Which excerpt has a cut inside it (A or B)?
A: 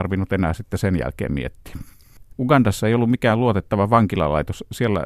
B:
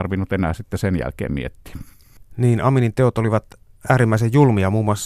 A